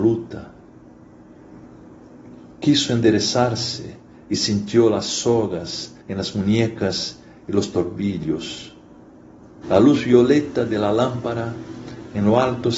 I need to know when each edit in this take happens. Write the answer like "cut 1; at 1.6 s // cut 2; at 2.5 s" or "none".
cut 1; at 6.0 s // cut 2; at 9.6 s